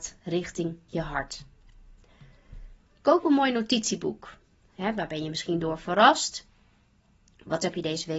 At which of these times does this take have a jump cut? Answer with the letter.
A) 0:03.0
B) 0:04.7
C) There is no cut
B